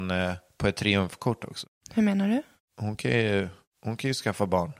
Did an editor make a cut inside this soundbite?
no; 0 cuts

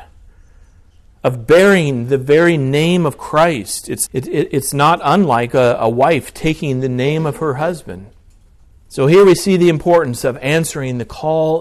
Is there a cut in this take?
yes; 2 cuts; at 4.1 s, 8.7 s

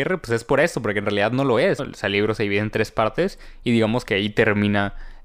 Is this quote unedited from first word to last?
no; 1 cut; at 1.8 s

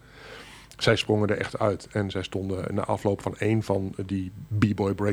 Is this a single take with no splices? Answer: yes; 0 cuts

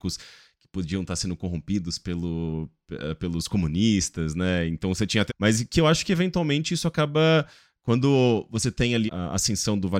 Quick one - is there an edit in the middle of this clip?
yes; 2 cuts; at 5.3 s, 9.1 s

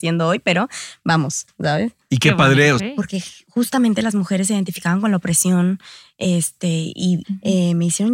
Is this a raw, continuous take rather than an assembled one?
no; 2 cuts; at 2.8 s, 7.2 s

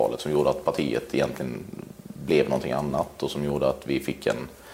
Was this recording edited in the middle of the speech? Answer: no; 0 cuts

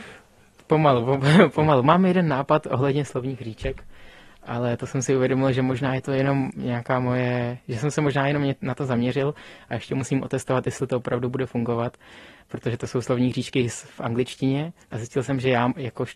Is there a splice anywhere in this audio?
yes; 1 cut; at 14.8 s

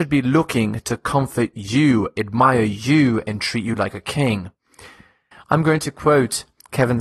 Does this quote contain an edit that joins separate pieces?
yes; 1 cut; at 5.3 s

